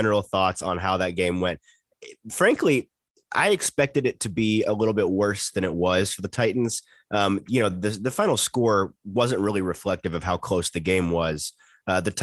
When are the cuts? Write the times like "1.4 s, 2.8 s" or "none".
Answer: none